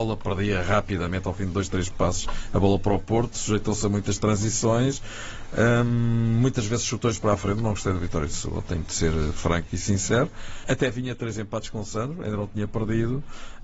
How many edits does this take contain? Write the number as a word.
one